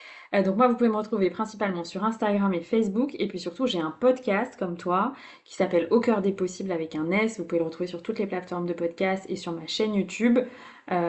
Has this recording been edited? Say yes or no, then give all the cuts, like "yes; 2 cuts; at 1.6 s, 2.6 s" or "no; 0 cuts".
no; 0 cuts